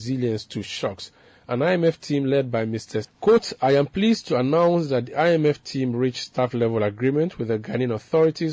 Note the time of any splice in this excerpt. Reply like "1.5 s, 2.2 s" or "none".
3.0 s